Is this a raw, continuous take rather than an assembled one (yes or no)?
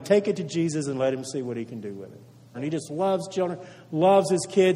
no